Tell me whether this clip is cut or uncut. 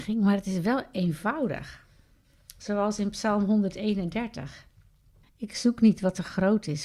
cut